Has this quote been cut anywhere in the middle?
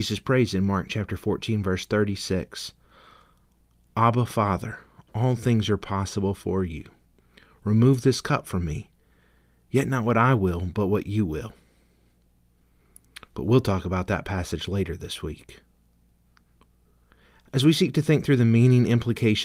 no; 0 cuts

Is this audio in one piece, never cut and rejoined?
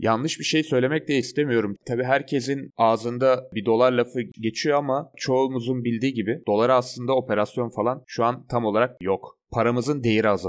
no; 1 cut; at 1.8 s

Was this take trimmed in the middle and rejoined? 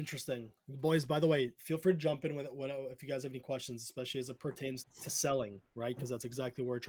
yes; 1 cut; at 4.8 s

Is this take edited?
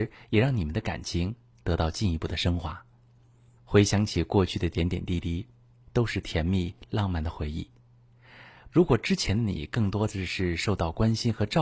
yes; 3 cuts; at 3.6 s, 5.8 s, 8.7 s

